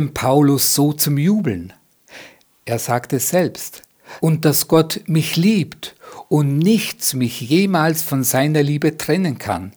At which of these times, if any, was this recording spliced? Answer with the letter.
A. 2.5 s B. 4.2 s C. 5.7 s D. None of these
B